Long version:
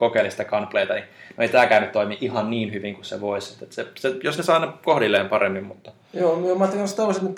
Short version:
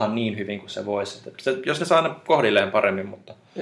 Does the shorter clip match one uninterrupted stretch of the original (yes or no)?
no